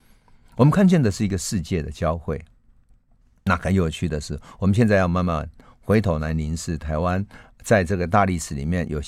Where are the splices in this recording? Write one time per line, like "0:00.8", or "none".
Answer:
none